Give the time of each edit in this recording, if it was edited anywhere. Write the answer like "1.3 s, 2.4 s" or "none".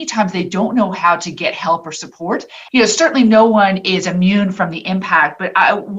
2.7 s